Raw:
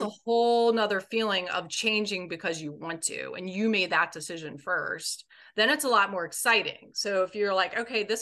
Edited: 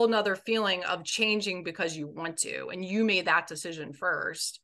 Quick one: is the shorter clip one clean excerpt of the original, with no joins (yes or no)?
yes